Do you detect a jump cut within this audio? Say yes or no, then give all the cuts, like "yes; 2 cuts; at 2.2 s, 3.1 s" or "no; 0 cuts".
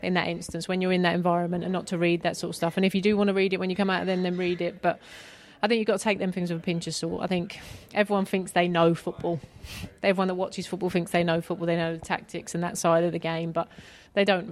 no; 0 cuts